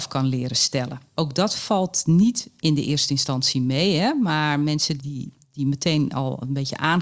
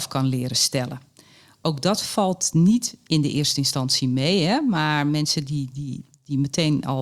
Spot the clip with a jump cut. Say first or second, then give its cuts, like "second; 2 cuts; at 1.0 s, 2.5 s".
first; 2 cuts; at 1.1 s, 5.0 s